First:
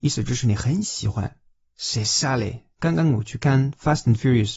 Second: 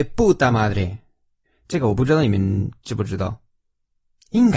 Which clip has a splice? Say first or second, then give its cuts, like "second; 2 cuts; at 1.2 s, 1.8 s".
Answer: first; 1 cut; at 2.7 s